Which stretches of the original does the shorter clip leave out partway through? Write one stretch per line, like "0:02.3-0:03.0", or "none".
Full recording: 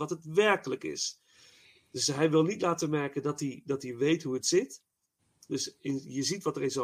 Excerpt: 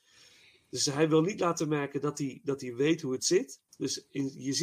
0:04.9-0:05.4

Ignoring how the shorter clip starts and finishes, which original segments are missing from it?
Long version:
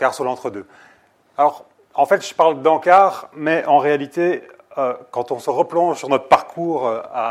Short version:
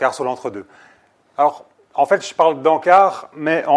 none

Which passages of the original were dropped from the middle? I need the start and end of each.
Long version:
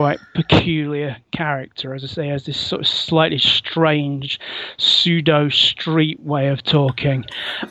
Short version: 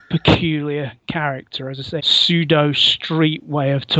0:02.2-0:04.8

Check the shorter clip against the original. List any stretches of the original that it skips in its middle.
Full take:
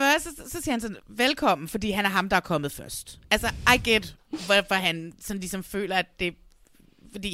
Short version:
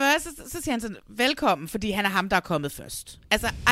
none

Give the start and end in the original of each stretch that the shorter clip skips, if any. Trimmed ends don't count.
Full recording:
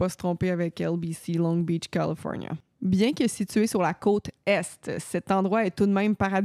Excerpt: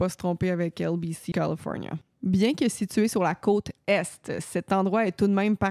0:01.3-0:01.9

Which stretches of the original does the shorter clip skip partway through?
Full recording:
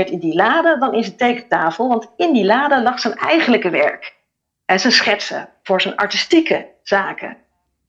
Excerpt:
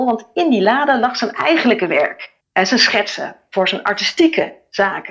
0:04.2-0:04.5

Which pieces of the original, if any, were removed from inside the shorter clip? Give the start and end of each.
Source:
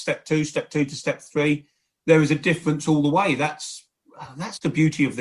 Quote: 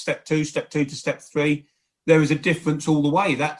none

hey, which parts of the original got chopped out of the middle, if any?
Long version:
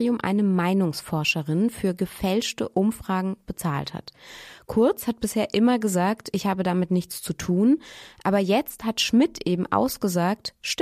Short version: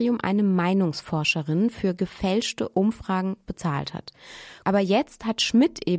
0:04.6-0:08.2

